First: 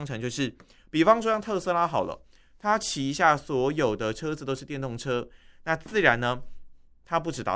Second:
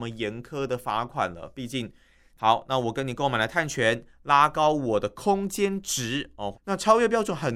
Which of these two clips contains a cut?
second; 2 cuts; at 2.4 s, 6.5 s

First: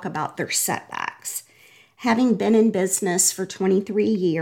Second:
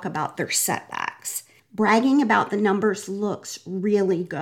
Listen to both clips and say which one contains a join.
second; 1 cut; at 1.6 s

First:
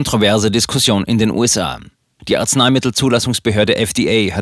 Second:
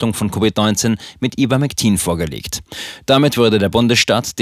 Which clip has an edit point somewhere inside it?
first; 1 cut; at 2.2 s

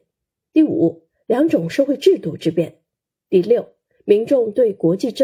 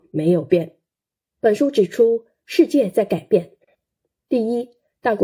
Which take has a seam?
second; 1 cut; at 1.3 s

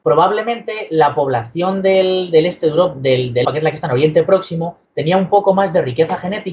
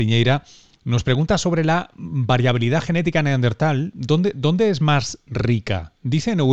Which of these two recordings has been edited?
first; 2 cuts; at 3.4 s, 4.8 s

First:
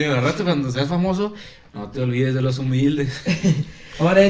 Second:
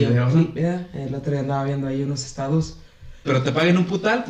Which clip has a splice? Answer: second; 1 cut; at 3.2 s

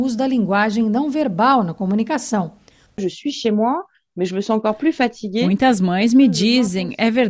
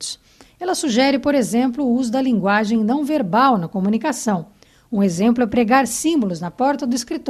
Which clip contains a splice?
first; 1 cut; at 2.9 s

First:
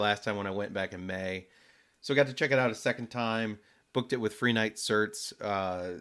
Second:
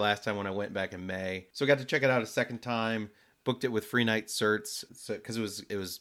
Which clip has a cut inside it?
second; 2 cuts; at 1.5 s, 4.9 s

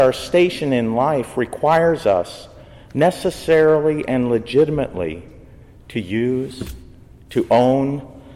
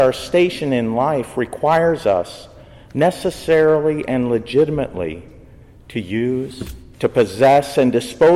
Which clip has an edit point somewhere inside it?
second; 1 cut; at 6.9 s

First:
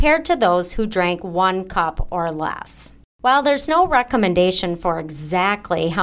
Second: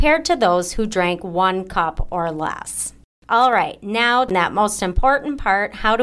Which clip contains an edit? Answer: first; 1 cut; at 3.1 s

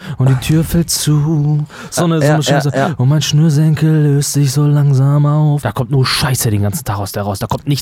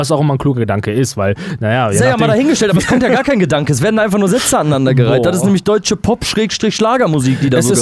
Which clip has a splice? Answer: first; 2 cuts; at 2.0 s, 5.6 s

